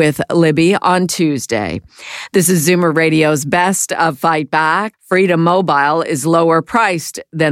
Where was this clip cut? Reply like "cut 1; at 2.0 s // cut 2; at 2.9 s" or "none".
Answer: cut 1; at 4.9 s